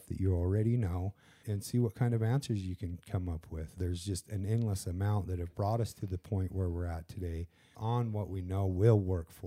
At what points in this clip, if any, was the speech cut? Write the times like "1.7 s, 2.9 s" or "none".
1.4 s, 3.8 s, 7.7 s